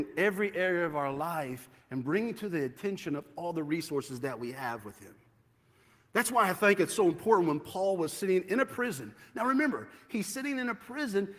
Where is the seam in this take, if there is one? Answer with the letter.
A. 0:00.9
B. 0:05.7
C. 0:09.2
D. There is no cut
D